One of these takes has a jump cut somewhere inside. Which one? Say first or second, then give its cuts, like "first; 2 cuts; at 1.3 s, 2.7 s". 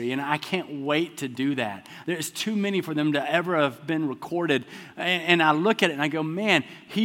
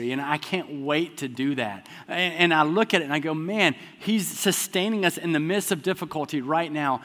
second; 1 cut; at 2.0 s